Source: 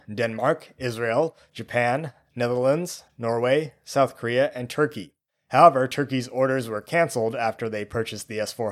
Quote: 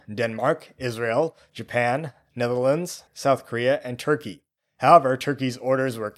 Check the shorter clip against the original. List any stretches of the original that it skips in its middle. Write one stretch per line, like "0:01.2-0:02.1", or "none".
0:03.1-0:03.8